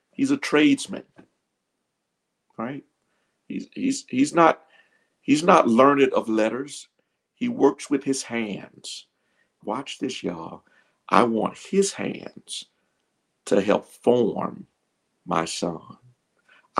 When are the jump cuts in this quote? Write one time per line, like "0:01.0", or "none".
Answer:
0:09.6

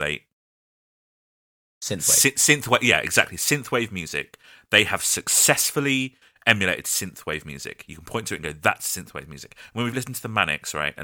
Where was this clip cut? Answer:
none

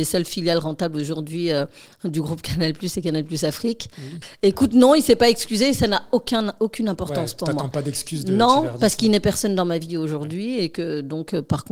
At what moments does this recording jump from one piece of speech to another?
0:04.2

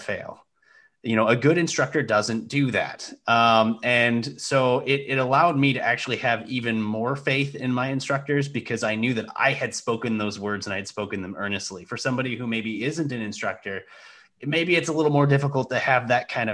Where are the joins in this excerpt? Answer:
none

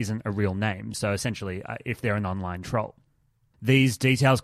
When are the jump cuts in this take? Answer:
none

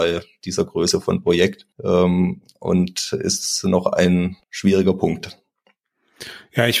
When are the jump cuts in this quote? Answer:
0:01.7
0:04.4

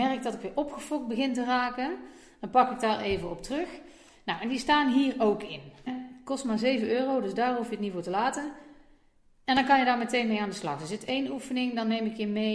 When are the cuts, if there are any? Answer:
0:05.9

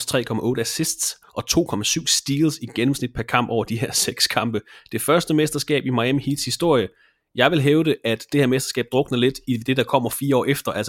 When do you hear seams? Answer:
none

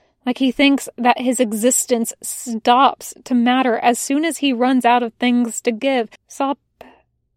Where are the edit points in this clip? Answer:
0:06.2

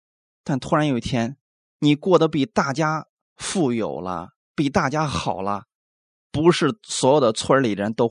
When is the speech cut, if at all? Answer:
none

